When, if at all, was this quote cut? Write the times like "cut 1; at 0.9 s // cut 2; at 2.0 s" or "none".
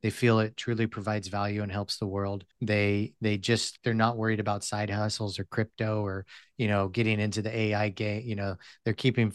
cut 1; at 2.5 s // cut 2; at 3.8 s

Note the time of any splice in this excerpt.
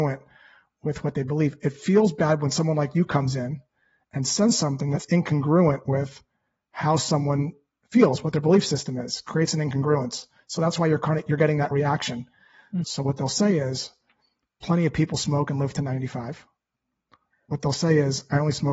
cut 1; at 12.8 s

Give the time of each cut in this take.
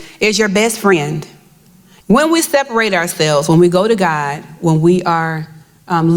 cut 1; at 2.0 s

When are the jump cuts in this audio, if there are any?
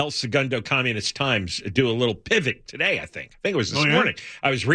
cut 1; at 2.7 s

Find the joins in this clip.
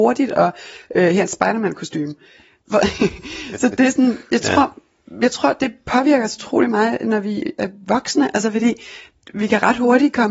cut 1; at 4.2 s

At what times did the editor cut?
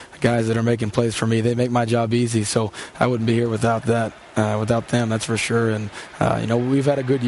none

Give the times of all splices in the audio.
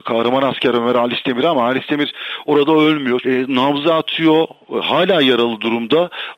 cut 1; at 3.2 s

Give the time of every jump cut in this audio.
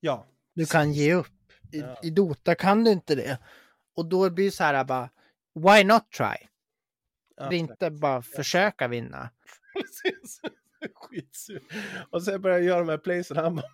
cut 1; at 7.5 s // cut 2; at 9.4 s

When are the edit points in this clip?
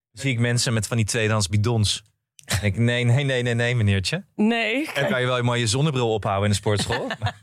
none

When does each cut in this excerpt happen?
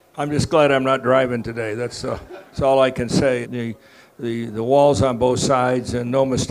cut 1; at 3.4 s

